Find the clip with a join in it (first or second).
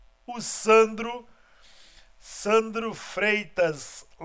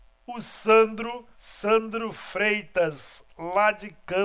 second